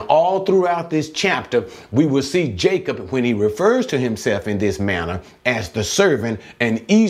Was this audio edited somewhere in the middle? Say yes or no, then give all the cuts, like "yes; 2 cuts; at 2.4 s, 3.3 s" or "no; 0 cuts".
no; 0 cuts